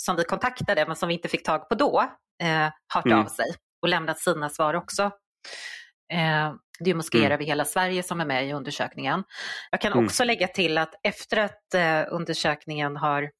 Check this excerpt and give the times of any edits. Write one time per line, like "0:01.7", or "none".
0:06.7
0:09.7